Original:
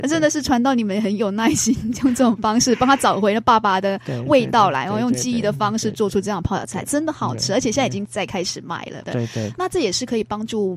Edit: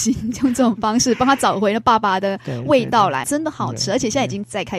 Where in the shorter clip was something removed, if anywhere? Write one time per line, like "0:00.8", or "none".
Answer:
0:03.2